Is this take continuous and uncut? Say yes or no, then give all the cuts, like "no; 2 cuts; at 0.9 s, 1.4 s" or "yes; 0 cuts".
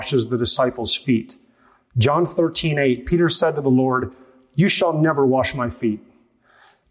yes; 0 cuts